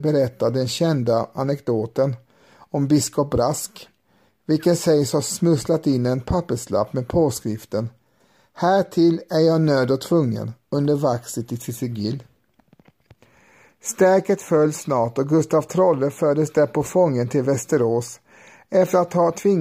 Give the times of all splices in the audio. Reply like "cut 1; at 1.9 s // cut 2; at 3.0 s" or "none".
none